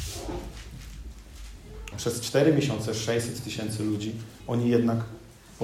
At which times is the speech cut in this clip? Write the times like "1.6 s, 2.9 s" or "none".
1.9 s, 4.4 s